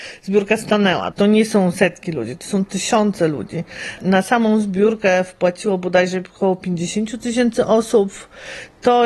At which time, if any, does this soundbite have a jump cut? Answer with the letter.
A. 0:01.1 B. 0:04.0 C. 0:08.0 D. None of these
A